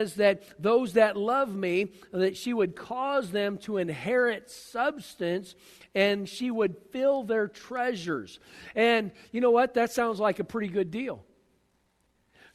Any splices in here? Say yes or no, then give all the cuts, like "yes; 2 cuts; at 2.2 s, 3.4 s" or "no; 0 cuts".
no; 0 cuts